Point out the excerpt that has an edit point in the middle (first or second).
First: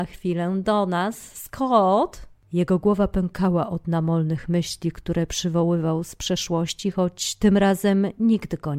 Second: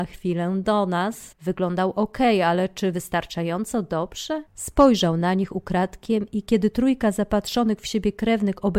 second